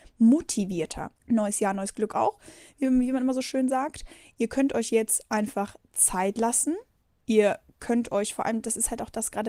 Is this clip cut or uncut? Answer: cut